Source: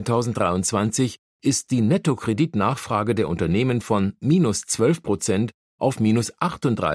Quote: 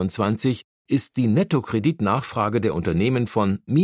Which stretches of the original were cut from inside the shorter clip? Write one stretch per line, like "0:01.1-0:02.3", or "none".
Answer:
none